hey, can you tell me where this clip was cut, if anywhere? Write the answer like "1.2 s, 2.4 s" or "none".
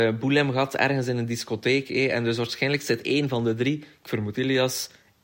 none